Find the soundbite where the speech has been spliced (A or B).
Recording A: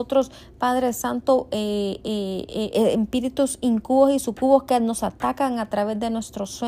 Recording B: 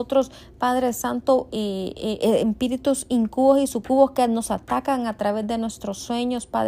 B